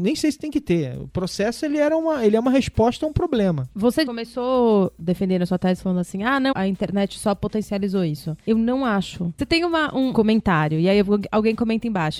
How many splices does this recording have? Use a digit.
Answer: 2